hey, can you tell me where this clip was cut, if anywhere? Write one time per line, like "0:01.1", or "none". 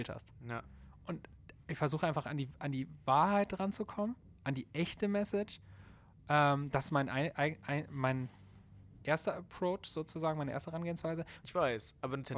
0:11.4